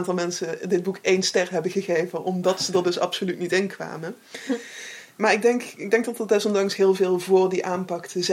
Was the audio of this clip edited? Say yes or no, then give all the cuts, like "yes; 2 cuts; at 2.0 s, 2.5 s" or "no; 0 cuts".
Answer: no; 0 cuts